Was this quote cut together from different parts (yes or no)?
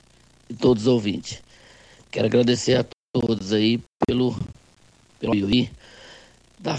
no